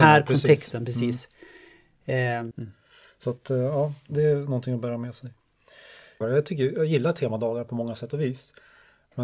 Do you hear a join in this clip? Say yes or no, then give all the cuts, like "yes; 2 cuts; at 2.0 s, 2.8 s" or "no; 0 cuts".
yes; 2 cuts; at 2.5 s, 6.2 s